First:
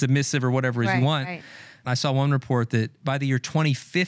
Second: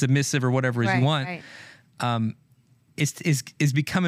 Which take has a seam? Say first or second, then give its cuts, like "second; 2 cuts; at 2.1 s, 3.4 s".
first; 1 cut; at 1.8 s